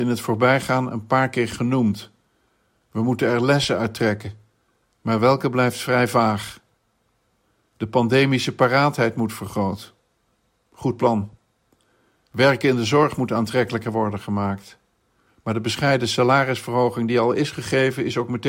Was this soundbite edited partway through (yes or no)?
no